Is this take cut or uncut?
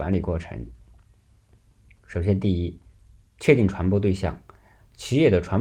uncut